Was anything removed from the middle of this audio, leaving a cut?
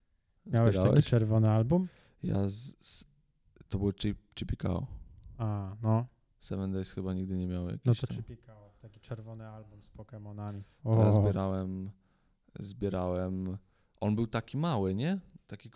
no; 0 cuts

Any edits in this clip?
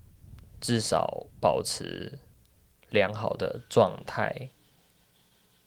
yes; 1 cut; at 1.3 s

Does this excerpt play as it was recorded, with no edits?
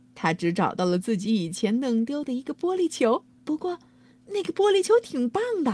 no; 1 cut; at 3.3 s

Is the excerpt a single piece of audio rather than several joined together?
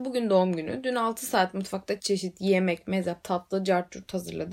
no; 2 cuts; at 2.0 s, 3.2 s

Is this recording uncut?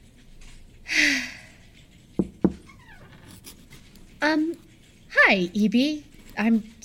yes; 0 cuts

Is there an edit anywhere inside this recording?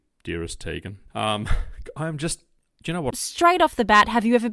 yes; 2 cuts; at 1.1 s, 3.1 s

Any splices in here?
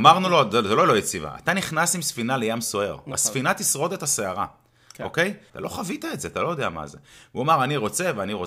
yes; 1 cut; at 5.5 s

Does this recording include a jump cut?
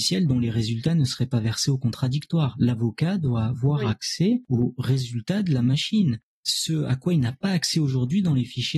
no; 0 cuts

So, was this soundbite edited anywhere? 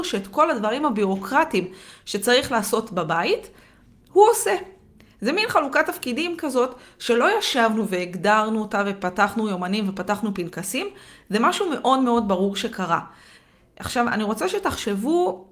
no; 0 cuts

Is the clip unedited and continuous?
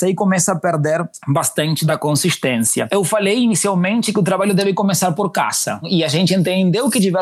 yes; 0 cuts

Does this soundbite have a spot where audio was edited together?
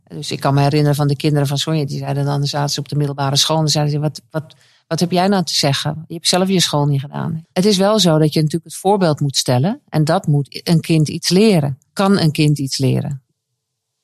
yes; 1 cut; at 7.4 s

